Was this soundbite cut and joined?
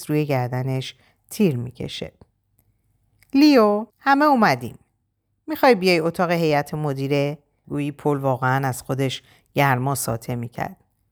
yes; 2 cuts; at 3.9 s, 7.6 s

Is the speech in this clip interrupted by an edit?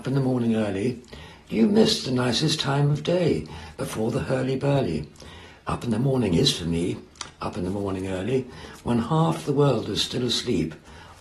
no; 0 cuts

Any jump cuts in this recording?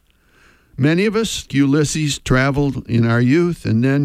yes; 1 cut; at 1.5 s

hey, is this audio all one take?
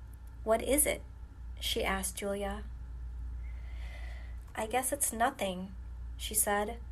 no; 1 cut; at 4.5 s

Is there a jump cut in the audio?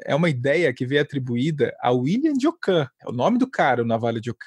no; 0 cuts

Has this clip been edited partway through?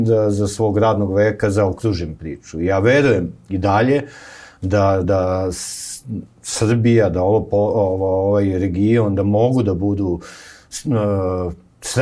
no; 0 cuts

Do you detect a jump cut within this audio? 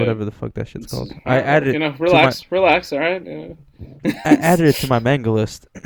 no; 0 cuts

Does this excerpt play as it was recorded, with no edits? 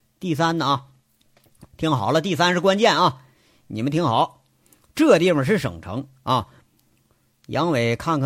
no; 1 cut; at 6.7 s

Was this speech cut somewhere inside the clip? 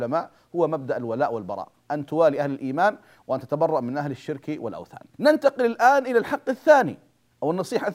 yes; 1 cut; at 5.1 s

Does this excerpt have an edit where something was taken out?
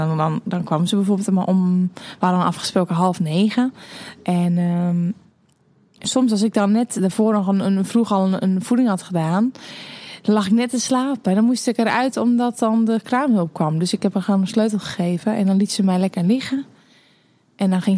yes; 1 cut; at 6.0 s

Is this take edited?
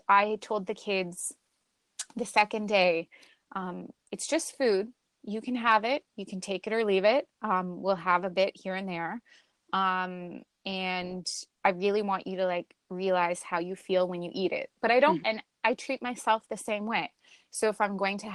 yes; 2 cuts; at 11.5 s, 15.2 s

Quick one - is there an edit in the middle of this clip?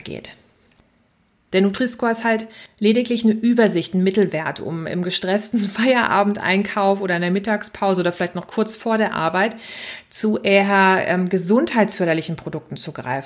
no; 0 cuts

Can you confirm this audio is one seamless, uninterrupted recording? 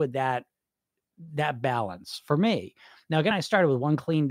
yes; 0 cuts

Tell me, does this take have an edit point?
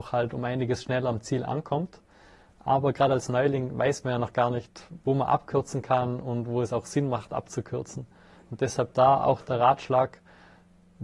no; 0 cuts

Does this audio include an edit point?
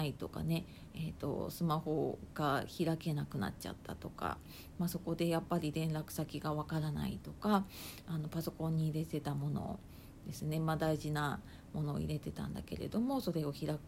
no; 0 cuts

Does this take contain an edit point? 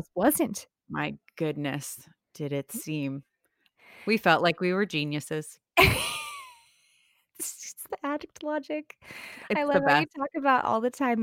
no; 0 cuts

